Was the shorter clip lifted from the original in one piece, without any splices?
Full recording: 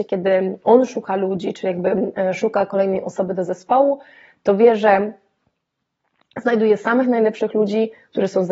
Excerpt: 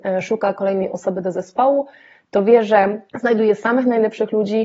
no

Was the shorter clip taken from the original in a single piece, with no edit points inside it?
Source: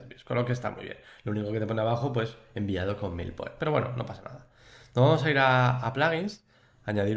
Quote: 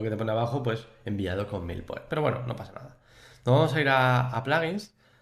yes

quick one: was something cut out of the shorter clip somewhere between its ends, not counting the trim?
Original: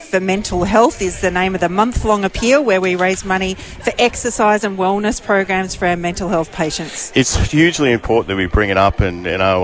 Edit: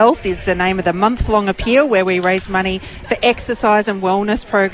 no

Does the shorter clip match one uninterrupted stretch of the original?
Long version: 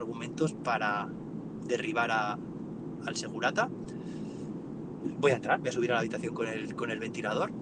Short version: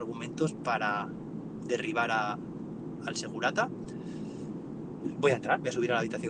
yes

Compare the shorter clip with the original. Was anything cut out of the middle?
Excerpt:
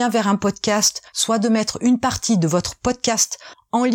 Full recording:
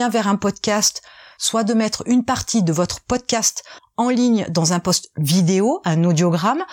yes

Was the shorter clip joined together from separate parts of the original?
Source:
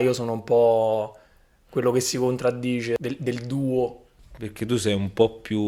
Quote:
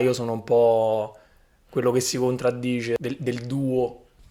no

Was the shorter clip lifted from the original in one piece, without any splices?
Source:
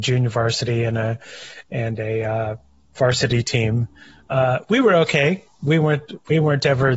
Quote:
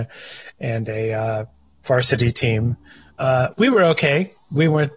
yes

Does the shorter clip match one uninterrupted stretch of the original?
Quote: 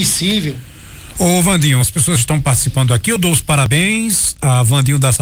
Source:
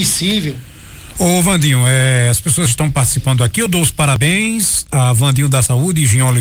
no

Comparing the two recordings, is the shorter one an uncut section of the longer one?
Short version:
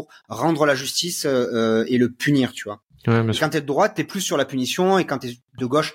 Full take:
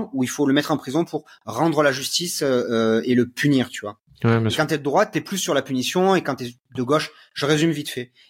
yes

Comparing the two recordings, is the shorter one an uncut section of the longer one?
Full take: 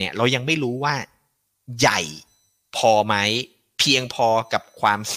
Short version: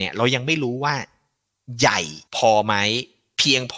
no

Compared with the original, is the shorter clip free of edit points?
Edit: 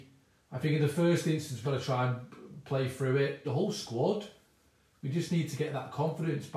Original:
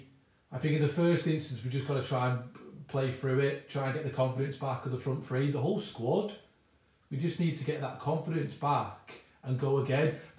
no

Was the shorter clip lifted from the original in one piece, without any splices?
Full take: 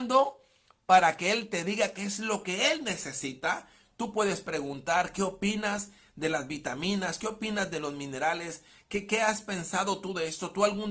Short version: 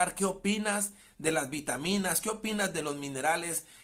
yes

